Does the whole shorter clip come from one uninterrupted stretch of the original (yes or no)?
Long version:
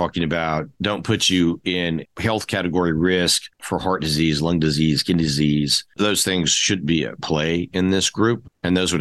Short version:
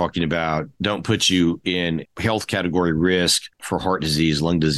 yes